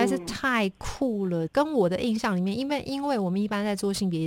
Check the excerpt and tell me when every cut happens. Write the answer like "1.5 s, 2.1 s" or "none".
1.5 s

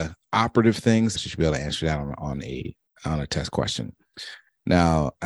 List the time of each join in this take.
1.1 s

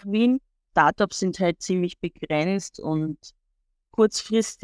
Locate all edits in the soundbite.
none

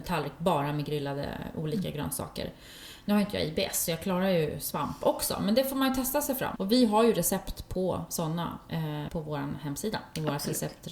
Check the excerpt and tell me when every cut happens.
6.6 s, 9.1 s

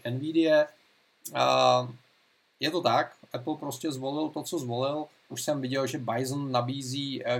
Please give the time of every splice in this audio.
5.3 s

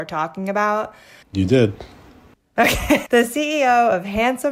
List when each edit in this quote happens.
1.2 s, 3.1 s

